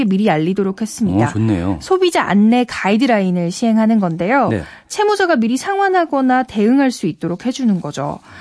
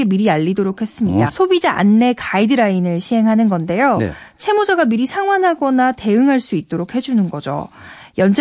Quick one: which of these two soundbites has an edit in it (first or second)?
second